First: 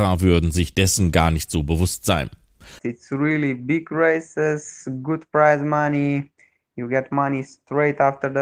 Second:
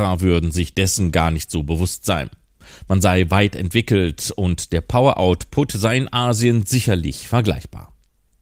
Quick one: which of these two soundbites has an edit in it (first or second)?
first